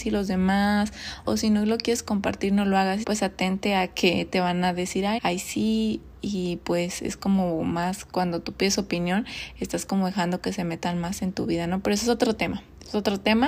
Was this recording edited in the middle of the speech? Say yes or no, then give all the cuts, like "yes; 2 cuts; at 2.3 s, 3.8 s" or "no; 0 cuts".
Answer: yes; 3 cuts; at 1.2 s, 3.0 s, 5.2 s